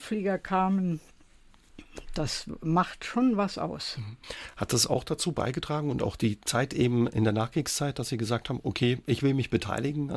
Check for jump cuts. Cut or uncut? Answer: uncut